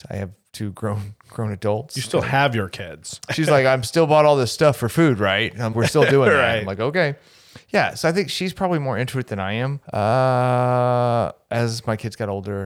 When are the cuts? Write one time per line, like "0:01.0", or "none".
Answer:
0:03.3
0:05.7
0:09.8